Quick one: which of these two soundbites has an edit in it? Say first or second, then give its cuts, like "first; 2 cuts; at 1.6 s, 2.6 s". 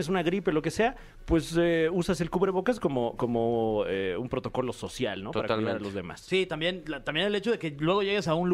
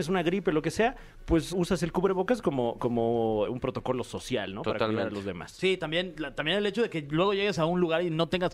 second; 2 cuts; at 1.5 s, 3.5 s